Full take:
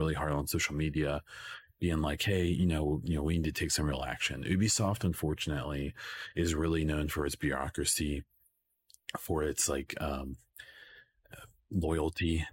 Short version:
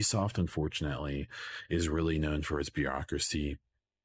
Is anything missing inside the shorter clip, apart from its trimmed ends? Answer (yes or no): no